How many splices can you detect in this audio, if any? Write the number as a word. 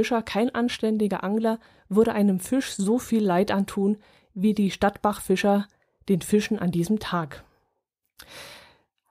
zero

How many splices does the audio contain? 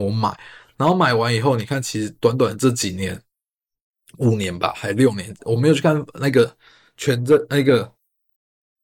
zero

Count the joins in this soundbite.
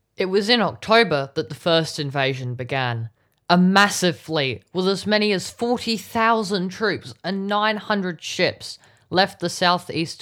zero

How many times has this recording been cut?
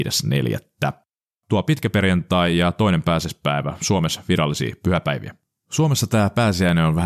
zero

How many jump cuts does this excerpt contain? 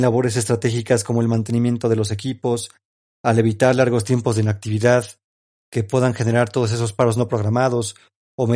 zero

